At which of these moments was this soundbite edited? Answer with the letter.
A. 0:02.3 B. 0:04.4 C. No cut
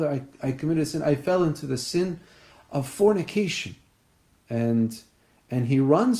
B